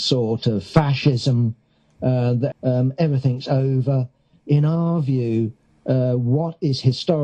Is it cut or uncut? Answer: cut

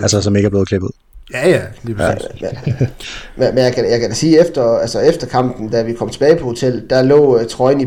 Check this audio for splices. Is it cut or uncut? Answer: uncut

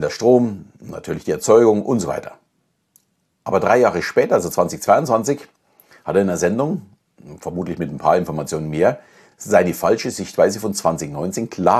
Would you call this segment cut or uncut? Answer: uncut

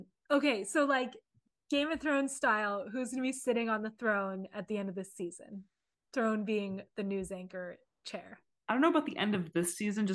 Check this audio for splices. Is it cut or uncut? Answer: cut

